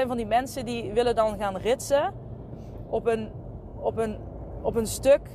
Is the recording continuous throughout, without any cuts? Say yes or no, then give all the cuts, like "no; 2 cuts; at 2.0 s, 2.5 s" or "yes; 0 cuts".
yes; 0 cuts